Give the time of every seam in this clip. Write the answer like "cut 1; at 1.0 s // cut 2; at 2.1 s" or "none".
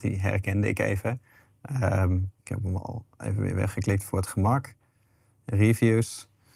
cut 1; at 2.4 s